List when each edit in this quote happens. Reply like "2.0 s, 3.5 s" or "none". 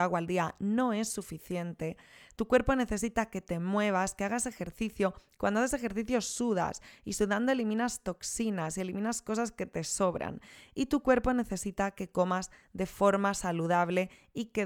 none